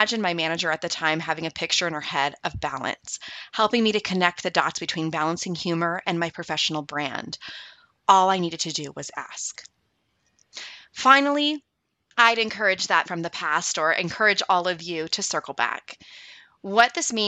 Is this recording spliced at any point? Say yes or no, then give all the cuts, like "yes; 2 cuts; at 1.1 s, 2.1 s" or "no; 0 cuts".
yes; 1 cut; at 13.0 s